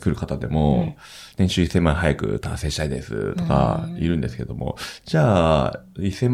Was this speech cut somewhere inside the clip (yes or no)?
no